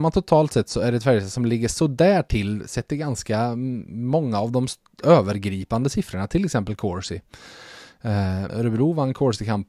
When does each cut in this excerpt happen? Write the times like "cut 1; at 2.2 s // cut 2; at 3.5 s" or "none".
cut 1; at 8.5 s